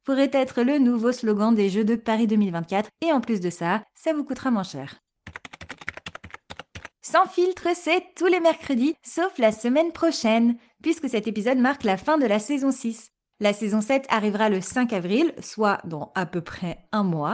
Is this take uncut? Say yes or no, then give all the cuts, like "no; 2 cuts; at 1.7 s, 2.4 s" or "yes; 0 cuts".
yes; 0 cuts